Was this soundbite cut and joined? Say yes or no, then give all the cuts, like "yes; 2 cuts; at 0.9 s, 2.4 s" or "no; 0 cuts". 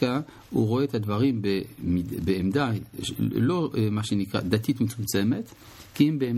no; 0 cuts